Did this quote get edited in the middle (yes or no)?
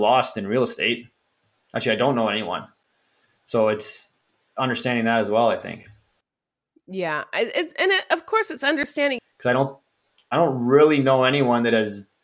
yes